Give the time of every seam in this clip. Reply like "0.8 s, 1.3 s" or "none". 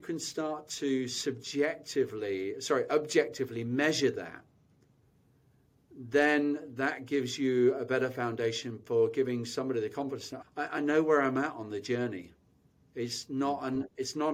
10.4 s